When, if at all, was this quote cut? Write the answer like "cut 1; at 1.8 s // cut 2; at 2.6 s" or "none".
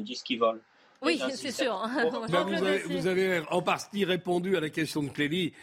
cut 1; at 2.3 s